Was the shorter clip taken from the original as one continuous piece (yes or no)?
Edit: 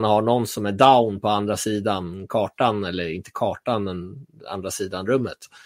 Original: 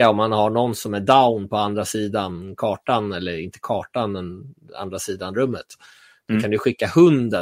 yes